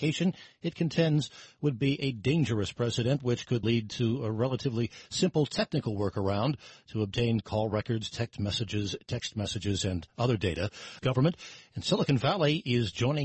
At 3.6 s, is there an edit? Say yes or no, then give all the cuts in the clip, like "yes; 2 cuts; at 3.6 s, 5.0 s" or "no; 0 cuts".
yes; 2 cuts; at 3.6 s, 11.0 s